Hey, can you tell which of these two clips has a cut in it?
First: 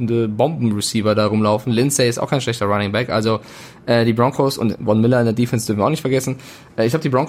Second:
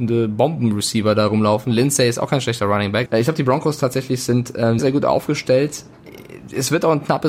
second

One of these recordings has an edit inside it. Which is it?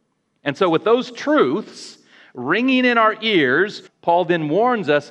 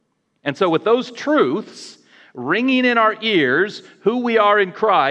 first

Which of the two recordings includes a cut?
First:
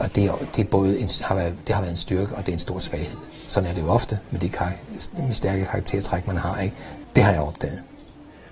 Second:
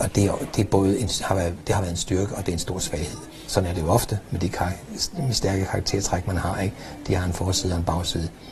first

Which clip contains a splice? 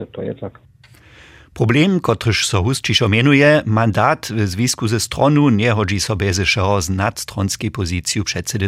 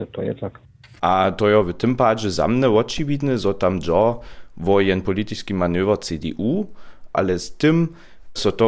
second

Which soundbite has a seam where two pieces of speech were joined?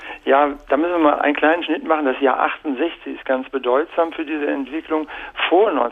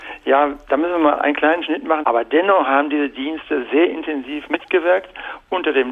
second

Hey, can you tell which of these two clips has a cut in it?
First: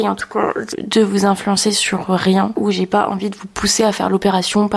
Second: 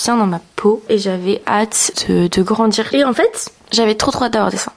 second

